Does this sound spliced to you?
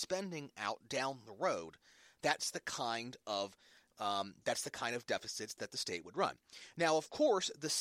no; 0 cuts

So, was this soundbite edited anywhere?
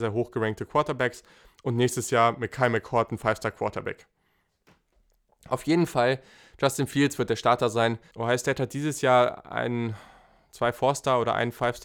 yes; 1 cut; at 8.1 s

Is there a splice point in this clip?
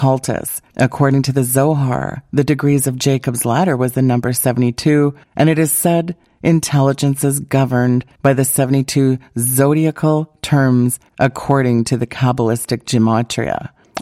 no; 0 cuts

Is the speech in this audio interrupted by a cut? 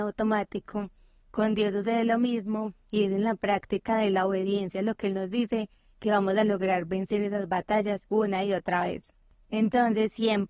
yes; 1 cut; at 8.1 s

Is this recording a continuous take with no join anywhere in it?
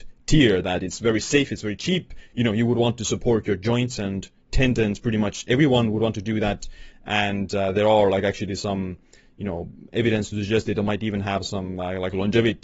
yes; 0 cuts

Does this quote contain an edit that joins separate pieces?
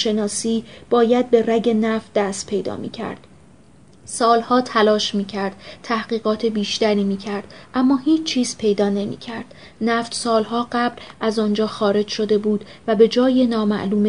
no; 0 cuts

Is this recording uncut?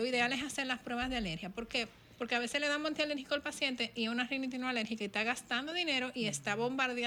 yes; 0 cuts

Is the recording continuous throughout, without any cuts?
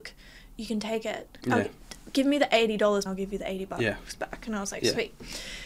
no; 2 cuts; at 1.4 s, 3.1 s

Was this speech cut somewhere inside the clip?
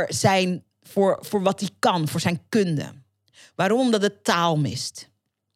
no; 0 cuts

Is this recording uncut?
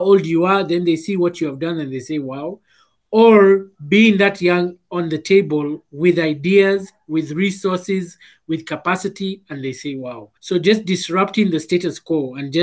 no; 1 cut; at 10.4 s

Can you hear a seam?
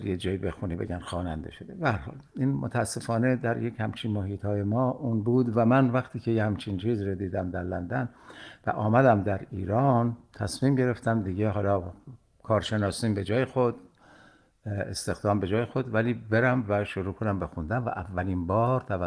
no; 0 cuts

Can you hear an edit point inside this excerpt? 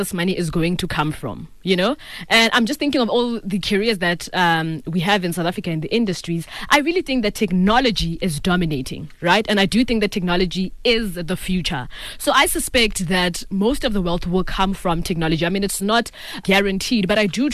yes; 1 cut; at 16.4 s

